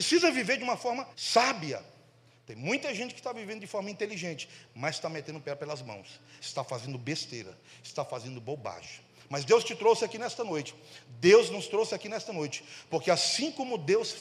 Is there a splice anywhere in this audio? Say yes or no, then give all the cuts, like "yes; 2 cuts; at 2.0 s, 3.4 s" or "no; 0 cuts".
yes; 2 cuts; at 1.1 s, 6.4 s